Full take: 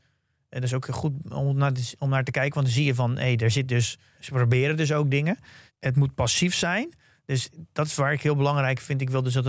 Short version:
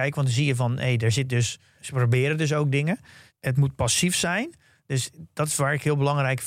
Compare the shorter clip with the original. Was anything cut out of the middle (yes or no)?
no